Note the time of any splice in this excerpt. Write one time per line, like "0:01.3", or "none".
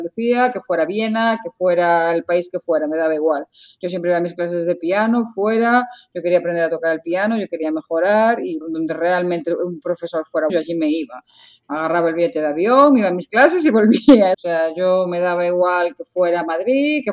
0:08.6
0:10.5
0:14.3